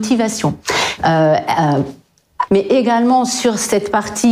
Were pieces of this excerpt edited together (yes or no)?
yes